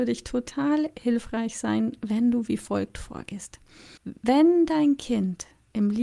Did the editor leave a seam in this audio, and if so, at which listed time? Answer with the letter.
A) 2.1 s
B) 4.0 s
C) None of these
B